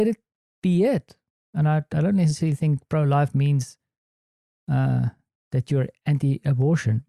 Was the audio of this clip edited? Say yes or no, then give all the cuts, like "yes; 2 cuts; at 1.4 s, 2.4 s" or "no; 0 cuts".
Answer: no; 0 cuts